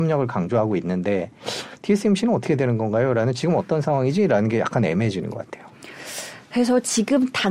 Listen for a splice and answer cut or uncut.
uncut